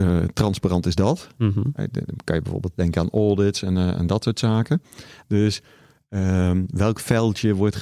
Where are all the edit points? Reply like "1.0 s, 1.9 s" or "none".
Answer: 5.2 s